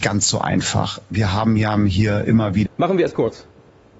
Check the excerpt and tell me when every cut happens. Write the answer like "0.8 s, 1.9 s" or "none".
2.7 s

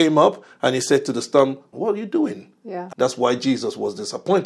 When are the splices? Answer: 1.7 s, 2.9 s

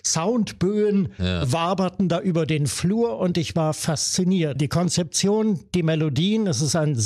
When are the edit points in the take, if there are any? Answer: 4.6 s

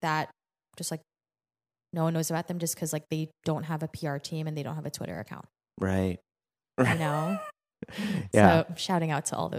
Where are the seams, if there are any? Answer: none

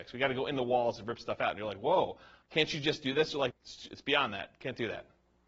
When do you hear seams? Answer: 3.5 s

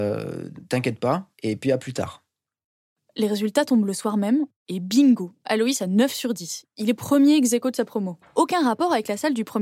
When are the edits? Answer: 1.3 s, 6.6 s, 8.2 s

